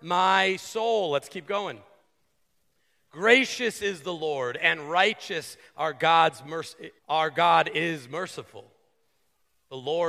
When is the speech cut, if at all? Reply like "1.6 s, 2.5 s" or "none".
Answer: 7.0 s

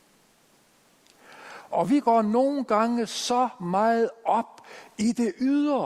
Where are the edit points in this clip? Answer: 1.7 s

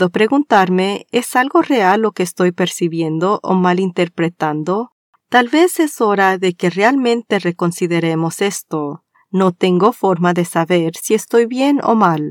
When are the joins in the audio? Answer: 5.1 s, 9.1 s

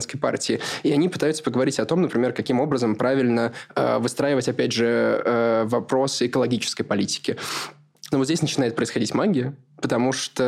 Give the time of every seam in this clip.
8.1 s

